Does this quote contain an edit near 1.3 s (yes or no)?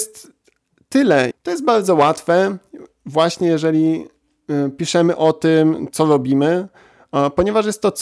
yes